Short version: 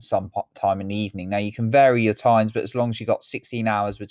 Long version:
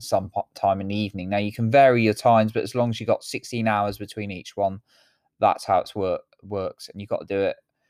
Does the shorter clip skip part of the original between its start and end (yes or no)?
no